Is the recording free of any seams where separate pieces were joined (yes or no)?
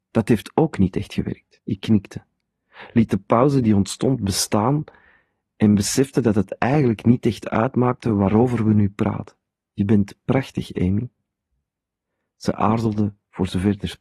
no